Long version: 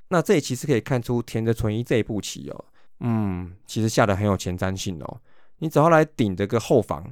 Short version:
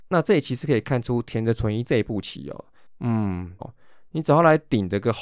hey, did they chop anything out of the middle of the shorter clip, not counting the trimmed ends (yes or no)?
yes